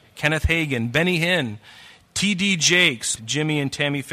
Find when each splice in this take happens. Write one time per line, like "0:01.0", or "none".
0:03.2